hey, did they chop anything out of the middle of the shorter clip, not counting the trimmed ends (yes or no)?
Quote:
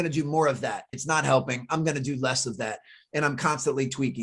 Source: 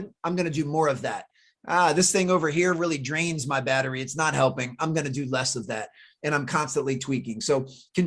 yes